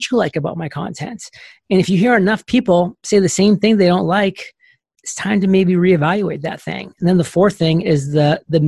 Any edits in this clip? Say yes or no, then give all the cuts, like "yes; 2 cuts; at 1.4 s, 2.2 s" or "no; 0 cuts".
no; 0 cuts